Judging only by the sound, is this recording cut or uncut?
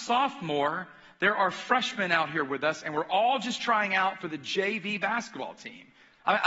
uncut